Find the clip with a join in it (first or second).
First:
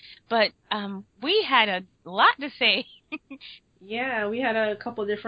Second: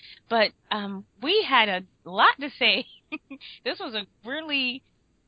first